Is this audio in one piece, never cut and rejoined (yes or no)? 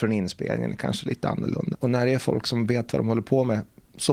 no